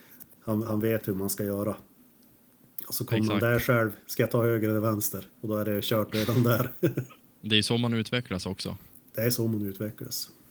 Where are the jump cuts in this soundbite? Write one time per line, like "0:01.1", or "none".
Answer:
0:05.3
0:07.2

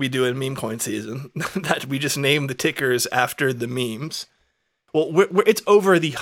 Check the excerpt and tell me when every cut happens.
0:04.9

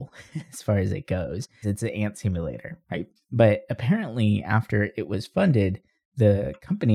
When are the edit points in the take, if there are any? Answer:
0:01.6
0:03.2

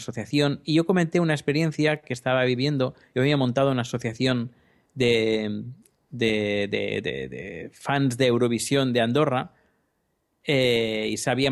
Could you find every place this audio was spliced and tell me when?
none

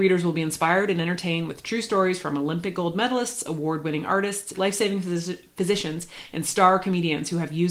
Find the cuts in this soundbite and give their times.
0:04.5

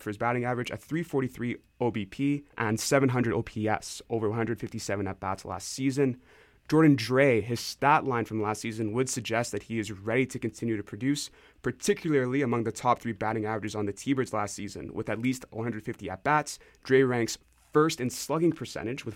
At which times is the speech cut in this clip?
0:02.5

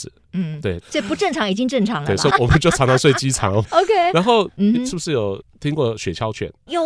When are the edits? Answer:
0:00.9

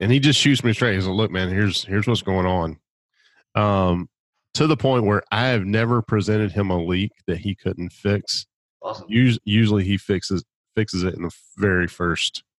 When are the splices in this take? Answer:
none

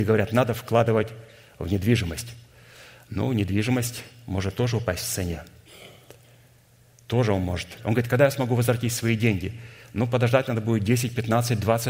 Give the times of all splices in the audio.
0:07.8

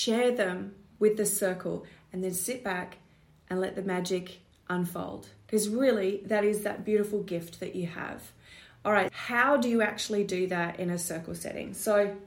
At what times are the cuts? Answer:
0:09.1

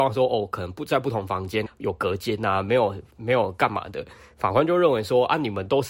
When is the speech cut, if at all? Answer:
0:01.7

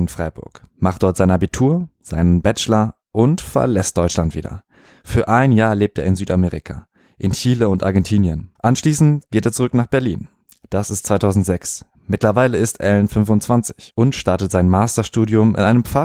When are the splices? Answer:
0:08.6

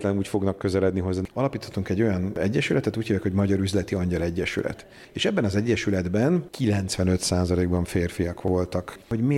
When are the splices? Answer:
0:01.3

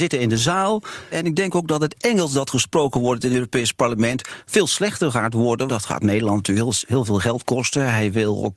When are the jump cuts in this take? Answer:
0:01.1
0:05.7

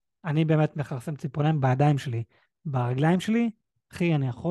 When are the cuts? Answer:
none

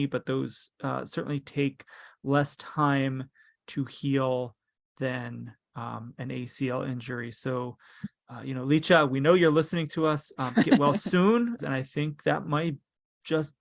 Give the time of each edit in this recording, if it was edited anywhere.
0:11.6

